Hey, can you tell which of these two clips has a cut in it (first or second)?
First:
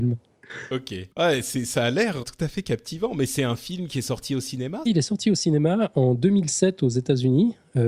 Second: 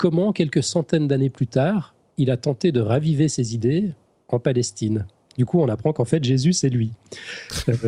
first